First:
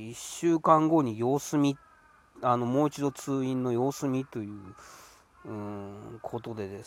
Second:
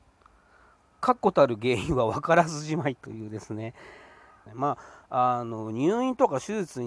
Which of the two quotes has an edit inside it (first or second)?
second